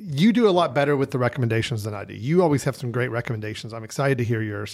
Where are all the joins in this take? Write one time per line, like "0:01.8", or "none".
none